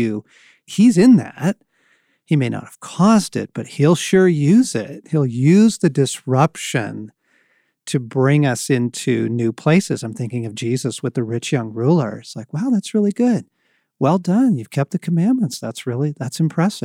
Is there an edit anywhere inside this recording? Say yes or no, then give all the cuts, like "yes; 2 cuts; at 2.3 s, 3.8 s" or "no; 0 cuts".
no; 0 cuts